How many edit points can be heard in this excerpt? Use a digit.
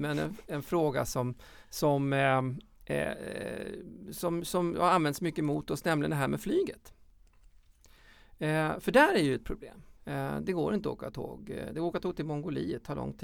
1